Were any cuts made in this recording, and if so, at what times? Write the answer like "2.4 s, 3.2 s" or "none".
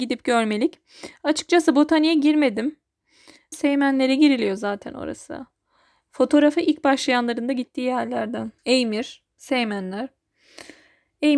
3.5 s, 8.6 s